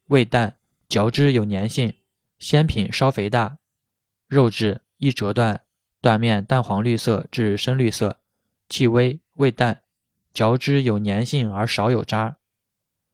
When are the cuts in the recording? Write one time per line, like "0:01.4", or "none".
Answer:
none